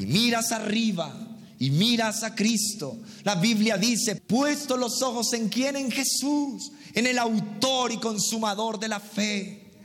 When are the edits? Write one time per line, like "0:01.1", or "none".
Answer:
0:04.2